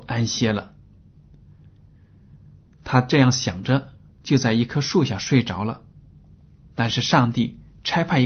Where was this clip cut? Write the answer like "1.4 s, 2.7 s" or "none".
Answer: none